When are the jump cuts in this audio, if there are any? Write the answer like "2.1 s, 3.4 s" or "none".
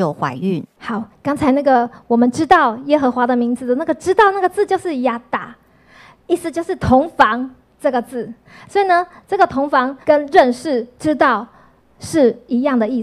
10.0 s